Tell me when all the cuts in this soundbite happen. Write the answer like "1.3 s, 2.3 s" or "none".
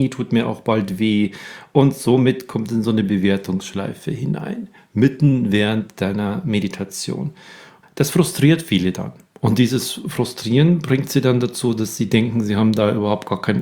none